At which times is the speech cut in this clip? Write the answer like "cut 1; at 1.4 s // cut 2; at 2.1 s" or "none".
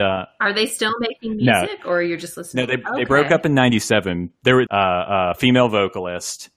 cut 1; at 4.7 s